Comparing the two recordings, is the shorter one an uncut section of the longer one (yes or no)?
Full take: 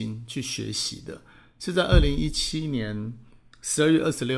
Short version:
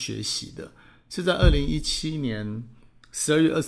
yes